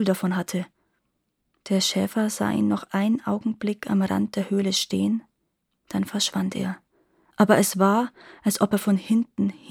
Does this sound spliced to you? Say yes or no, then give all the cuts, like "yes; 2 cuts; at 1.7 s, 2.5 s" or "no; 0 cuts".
no; 0 cuts